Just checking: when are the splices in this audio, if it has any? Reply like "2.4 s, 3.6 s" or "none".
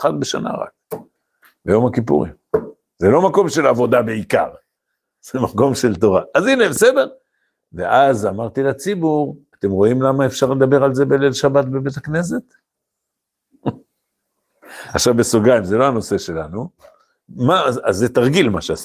none

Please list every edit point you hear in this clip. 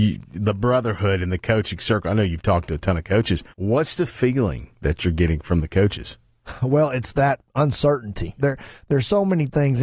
3.5 s, 8.4 s

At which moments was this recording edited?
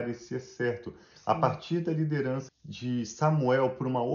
2.5 s

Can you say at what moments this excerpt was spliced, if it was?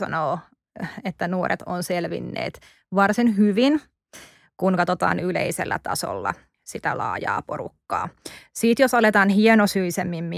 none

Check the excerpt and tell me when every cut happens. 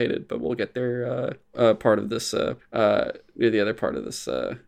1.5 s, 2.6 s

